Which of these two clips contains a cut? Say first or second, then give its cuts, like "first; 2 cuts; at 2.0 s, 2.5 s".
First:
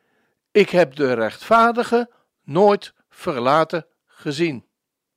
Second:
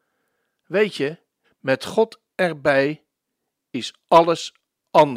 second; 1 cut; at 1.4 s